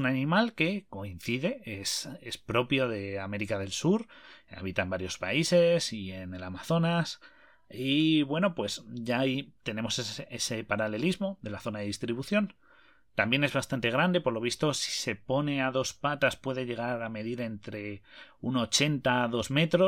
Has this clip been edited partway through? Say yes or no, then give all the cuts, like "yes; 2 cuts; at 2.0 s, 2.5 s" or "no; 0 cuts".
no; 0 cuts